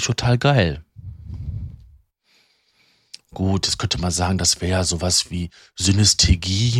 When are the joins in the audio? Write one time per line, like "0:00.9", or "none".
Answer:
none